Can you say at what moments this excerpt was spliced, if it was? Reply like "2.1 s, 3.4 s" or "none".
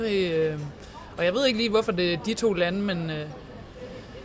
none